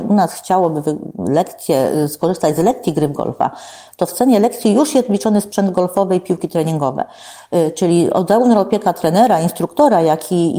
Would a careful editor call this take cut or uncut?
uncut